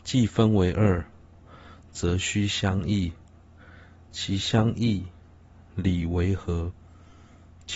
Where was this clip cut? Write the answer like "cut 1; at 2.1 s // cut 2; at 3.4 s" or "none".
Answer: none